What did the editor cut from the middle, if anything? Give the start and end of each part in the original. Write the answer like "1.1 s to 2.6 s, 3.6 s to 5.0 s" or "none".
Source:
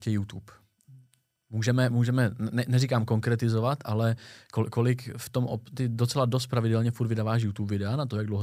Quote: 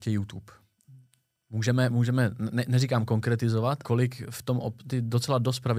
3.8 s to 4.7 s